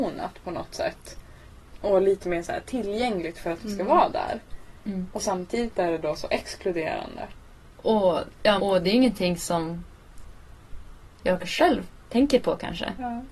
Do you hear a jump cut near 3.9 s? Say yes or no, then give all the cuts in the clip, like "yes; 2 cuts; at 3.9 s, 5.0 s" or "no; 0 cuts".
no; 1 cut; at 8.6 s